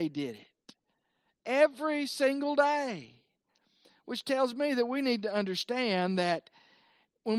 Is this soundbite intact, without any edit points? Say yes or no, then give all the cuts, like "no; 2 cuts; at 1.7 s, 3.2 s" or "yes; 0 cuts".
yes; 0 cuts